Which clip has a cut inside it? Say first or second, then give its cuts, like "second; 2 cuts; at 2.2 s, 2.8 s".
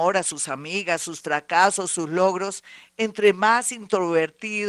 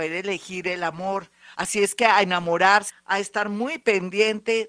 second; 2 cuts; at 1.5 s, 2.9 s